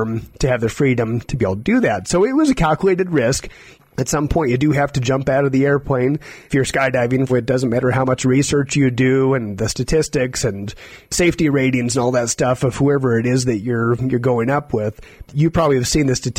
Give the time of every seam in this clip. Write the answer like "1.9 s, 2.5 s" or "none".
7.3 s, 15.2 s